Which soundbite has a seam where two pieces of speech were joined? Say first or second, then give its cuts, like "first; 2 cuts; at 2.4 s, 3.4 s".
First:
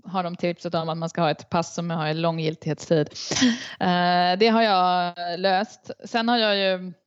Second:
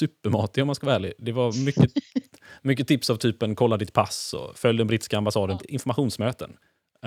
second; 1 cut; at 5.6 s